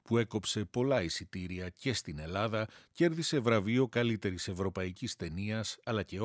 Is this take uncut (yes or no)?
yes